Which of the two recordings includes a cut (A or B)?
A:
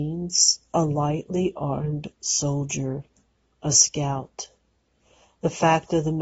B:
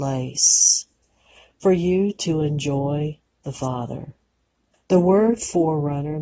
B